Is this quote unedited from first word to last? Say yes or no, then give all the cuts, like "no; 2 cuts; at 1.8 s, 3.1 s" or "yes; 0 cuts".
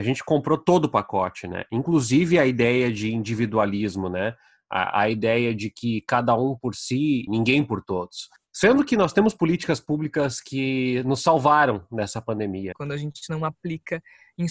no; 2 cuts; at 7.3 s, 12.7 s